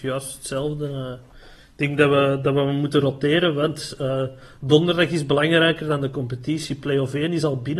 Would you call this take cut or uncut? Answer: uncut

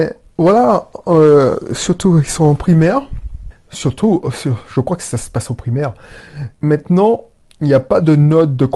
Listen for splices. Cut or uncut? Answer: cut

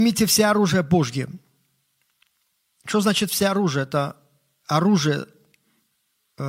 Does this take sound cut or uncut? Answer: uncut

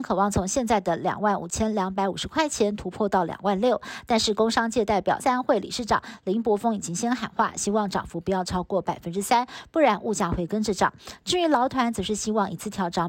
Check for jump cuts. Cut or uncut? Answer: cut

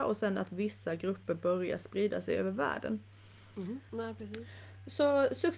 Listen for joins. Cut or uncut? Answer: cut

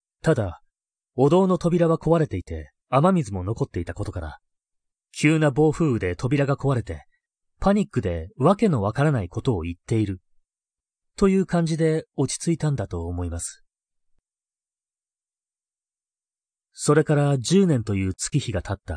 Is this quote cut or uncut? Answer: uncut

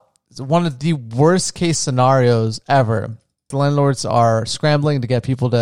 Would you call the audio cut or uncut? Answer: cut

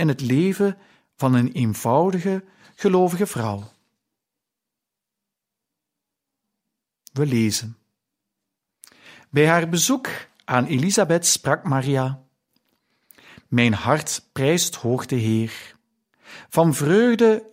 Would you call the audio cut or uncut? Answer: uncut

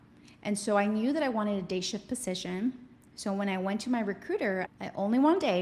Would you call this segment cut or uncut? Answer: cut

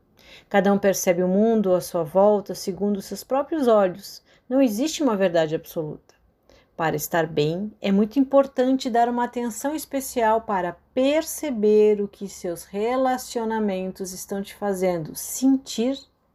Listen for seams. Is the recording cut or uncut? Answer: uncut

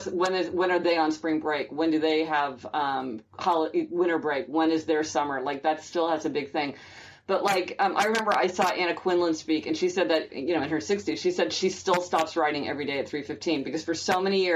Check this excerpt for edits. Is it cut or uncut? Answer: cut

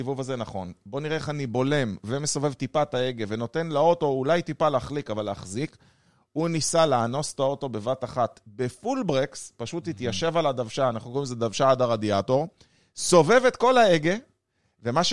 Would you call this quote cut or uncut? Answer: uncut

